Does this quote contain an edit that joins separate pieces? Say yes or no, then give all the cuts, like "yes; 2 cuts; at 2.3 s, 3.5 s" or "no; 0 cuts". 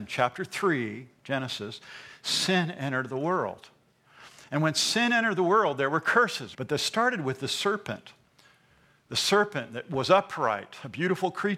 yes; 1 cut; at 6.5 s